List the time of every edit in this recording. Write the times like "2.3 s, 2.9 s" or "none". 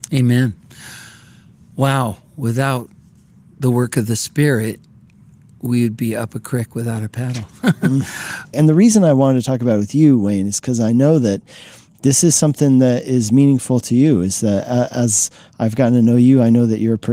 8.5 s